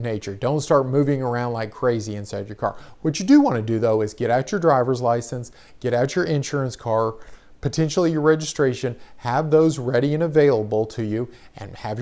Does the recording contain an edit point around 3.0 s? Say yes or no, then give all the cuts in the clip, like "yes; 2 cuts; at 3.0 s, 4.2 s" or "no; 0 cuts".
no; 0 cuts